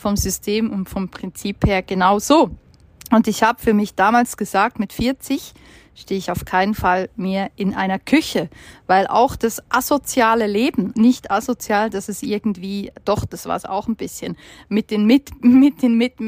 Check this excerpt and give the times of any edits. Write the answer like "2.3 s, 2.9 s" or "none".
10.9 s

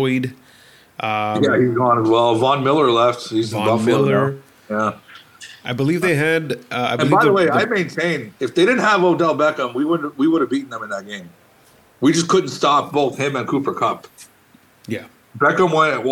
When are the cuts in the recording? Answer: 5.6 s

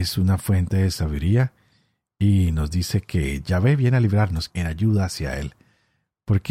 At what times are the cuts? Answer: 4.5 s

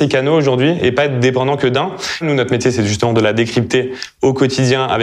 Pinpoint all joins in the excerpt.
2.2 s

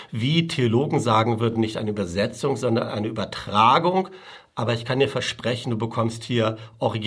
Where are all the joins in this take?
none

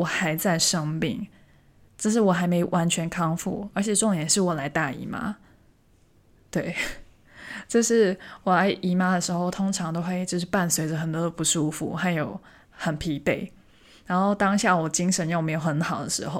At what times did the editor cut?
none

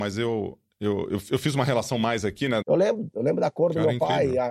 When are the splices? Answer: 2.6 s

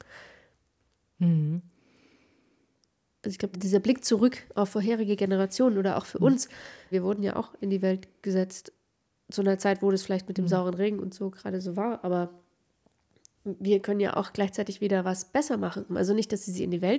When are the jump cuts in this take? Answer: 3.5 s, 6.9 s, 15.9 s

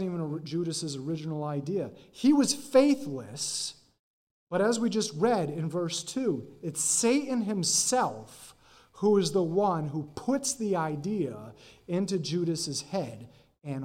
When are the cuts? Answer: none

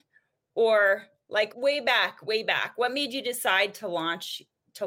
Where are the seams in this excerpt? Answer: 1.5 s

